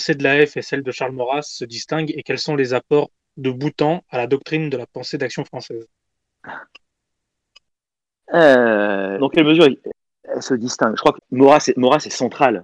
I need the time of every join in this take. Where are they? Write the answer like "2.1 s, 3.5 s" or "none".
9.2 s, 11.2 s